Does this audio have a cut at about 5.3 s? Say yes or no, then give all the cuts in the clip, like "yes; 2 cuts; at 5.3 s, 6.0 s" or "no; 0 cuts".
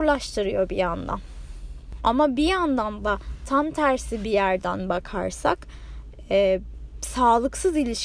no; 1 cut; at 2.0 s